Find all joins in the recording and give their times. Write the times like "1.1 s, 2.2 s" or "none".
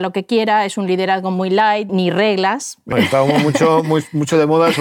1.9 s, 2.9 s